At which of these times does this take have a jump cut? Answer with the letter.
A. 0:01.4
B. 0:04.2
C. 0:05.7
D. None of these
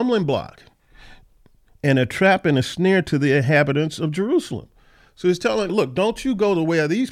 C